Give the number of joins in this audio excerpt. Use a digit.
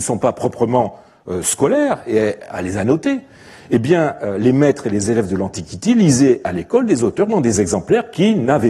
0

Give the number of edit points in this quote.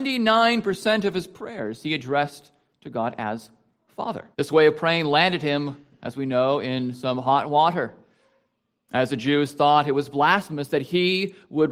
1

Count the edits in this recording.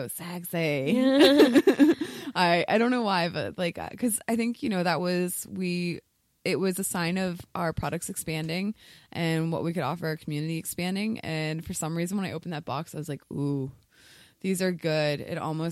0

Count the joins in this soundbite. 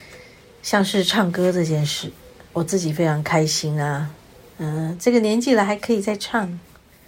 0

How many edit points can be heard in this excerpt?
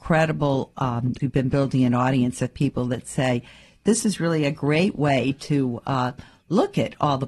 1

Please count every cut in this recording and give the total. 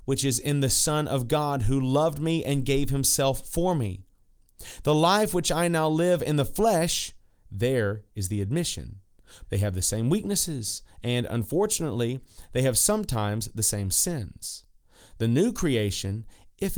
1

